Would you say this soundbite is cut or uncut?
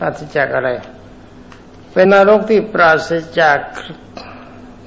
cut